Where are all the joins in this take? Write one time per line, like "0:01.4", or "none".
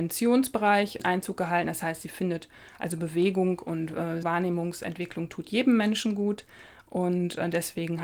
0:04.2